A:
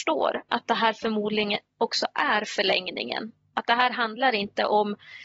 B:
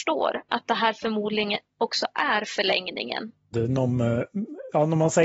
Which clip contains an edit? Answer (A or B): B